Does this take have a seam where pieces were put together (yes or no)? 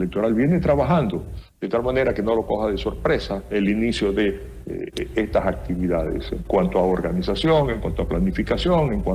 no